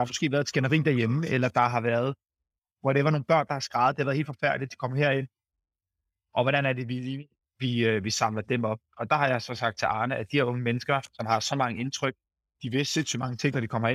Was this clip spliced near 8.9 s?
yes; 1 cut; at 8.9 s

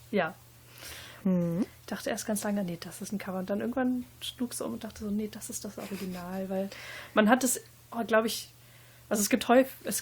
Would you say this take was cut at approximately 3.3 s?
no; 1 cut; at 1.2 s

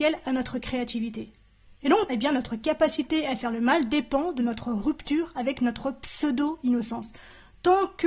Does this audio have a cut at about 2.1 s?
yes; 1 cut; at 2.1 s

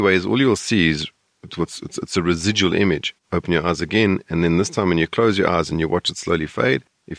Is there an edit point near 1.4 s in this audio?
no; 1 cut; at 3.2 s

